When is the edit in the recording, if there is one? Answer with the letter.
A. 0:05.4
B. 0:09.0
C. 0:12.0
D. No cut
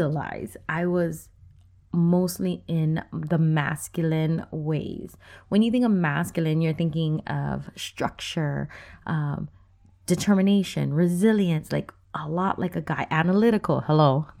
C